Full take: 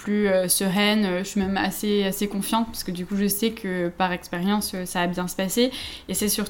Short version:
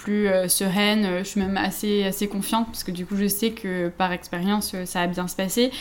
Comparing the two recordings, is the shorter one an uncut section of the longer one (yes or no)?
yes